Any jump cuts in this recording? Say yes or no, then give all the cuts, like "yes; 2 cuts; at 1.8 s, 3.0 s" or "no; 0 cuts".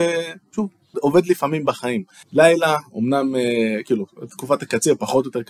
yes; 2 cuts; at 0.9 s, 2.2 s